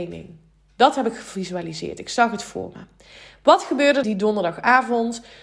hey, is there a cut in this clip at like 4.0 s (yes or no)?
yes